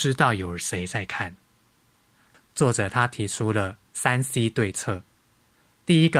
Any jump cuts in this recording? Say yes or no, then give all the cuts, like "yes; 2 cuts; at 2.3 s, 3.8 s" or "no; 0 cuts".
yes; 1 cut; at 2.3 s